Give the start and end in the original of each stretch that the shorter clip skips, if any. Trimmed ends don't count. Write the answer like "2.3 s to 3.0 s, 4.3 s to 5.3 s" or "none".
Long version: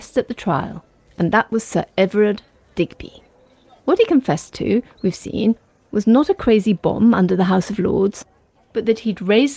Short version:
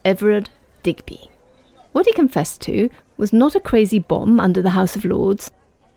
4.9 s to 5.8 s